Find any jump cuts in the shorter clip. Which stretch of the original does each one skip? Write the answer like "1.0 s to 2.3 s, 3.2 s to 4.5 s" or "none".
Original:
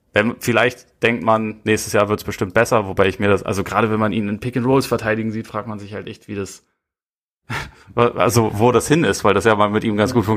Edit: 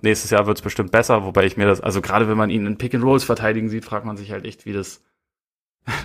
none